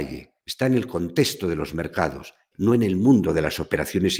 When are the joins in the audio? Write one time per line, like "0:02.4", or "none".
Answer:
0:02.5